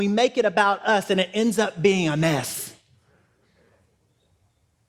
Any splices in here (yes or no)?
no